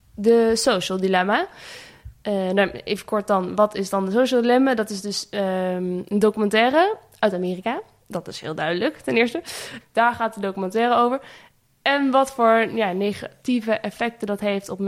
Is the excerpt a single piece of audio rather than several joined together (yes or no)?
no